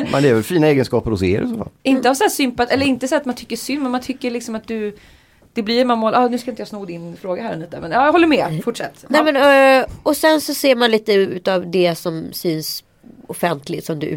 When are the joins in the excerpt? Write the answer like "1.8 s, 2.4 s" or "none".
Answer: none

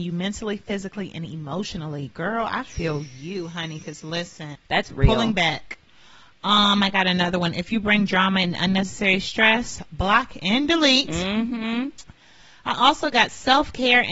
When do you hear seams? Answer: 4.5 s

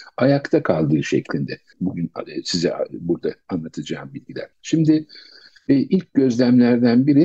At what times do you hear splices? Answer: 1.7 s, 4.5 s

